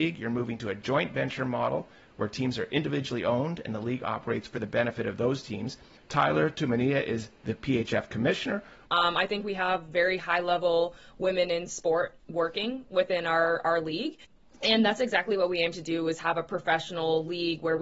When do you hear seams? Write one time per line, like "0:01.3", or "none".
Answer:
0:08.8